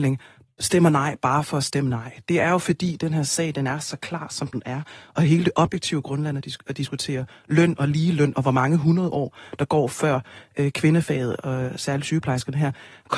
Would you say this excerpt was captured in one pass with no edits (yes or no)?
yes